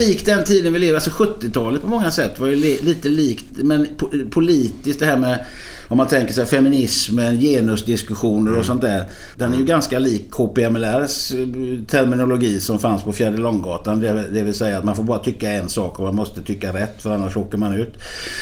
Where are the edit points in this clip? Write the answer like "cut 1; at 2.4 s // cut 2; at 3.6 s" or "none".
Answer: cut 1; at 3.5 s // cut 2; at 9.3 s

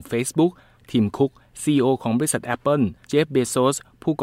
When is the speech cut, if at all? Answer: cut 1; at 3.0 s

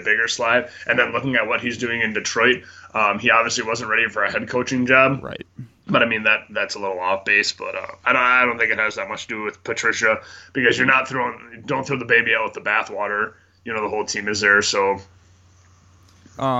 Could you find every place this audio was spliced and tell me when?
cut 1; at 8.0 s

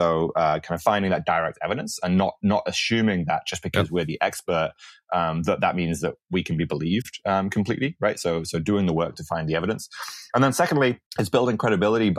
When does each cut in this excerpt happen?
cut 1; at 11.1 s

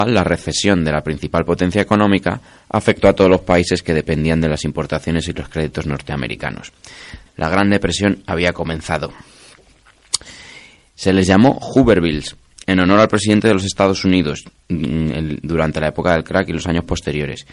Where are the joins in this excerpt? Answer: cut 1; at 7.3 s // cut 2; at 10.8 s

